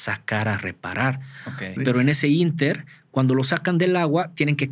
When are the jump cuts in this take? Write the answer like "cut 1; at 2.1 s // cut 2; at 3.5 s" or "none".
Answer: cut 1; at 1.8 s